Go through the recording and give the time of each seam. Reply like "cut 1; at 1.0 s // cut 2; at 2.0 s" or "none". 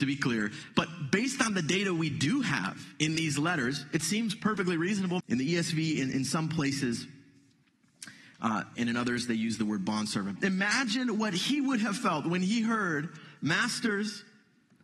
cut 1; at 5.2 s // cut 2; at 8.7 s // cut 3; at 10.4 s